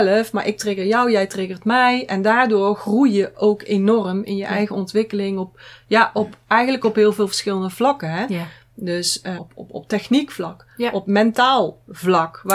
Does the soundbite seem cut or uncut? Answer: cut